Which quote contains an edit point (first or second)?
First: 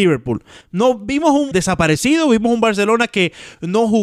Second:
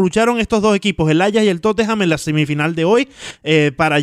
first